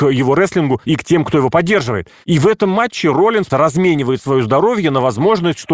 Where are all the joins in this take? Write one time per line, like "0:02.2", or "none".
0:03.5